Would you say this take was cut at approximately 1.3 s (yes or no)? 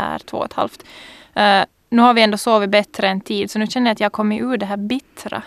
no